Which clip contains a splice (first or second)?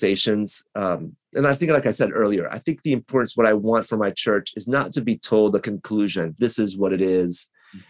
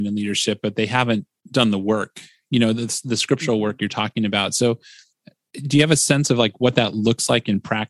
first